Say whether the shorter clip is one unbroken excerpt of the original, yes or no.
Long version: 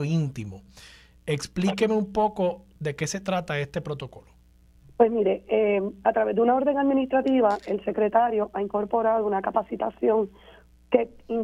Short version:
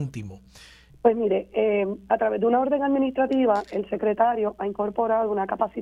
no